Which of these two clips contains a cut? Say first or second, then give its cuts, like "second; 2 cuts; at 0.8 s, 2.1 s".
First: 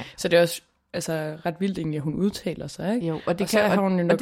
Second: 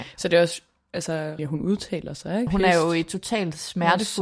second; 2 cuts; at 1.4 s, 2.5 s